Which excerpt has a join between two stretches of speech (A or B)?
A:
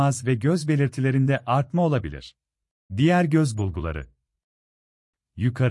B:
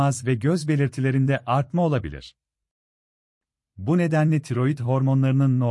A